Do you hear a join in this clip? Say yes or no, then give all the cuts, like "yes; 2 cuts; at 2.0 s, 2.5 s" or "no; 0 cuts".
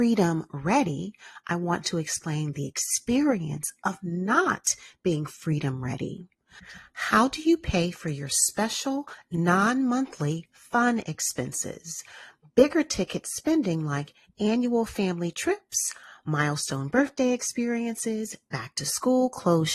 no; 0 cuts